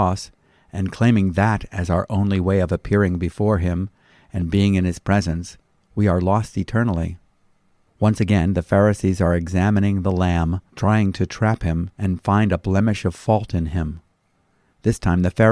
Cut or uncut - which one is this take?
cut